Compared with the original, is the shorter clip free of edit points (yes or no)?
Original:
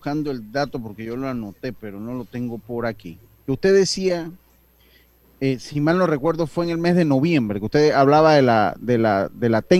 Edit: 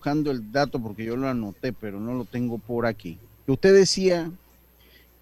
yes